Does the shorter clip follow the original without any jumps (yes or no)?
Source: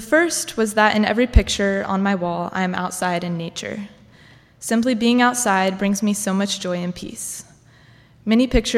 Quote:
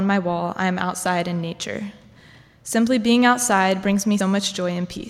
no